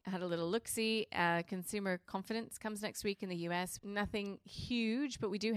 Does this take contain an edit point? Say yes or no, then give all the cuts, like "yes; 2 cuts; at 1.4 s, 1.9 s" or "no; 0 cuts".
yes; 1 cut; at 3.8 s